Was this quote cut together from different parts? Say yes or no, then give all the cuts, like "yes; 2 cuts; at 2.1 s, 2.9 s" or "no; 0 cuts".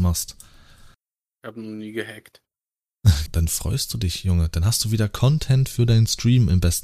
yes; 1 cut; at 3.3 s